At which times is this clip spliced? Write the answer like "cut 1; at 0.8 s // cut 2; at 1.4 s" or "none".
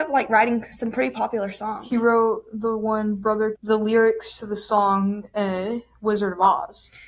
cut 1; at 3.5 s